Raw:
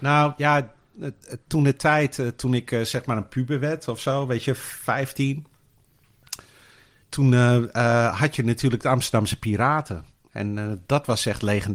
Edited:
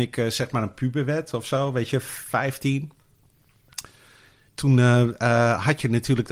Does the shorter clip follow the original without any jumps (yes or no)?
yes